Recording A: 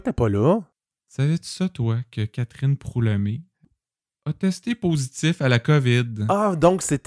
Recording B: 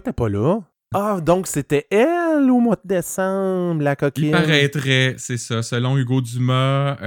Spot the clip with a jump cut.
B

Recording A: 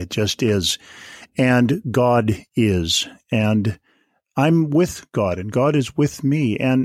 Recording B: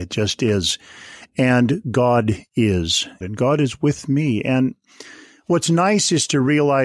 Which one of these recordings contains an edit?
B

